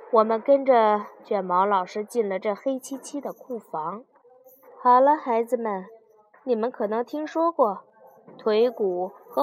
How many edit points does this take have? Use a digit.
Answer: 0